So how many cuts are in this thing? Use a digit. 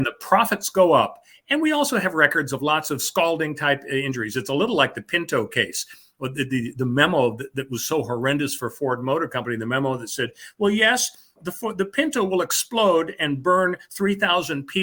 0